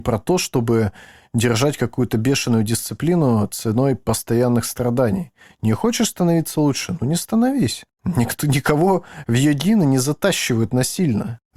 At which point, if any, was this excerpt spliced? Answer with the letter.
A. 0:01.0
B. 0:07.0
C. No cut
C